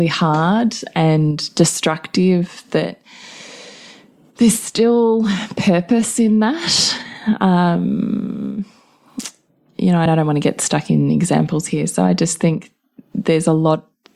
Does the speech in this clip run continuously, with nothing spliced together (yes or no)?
no